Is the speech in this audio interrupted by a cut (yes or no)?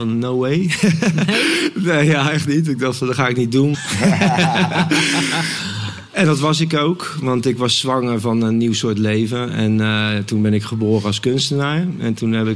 yes